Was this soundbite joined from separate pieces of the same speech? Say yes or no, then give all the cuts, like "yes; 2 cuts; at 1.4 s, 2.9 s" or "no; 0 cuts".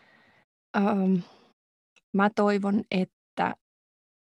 no; 0 cuts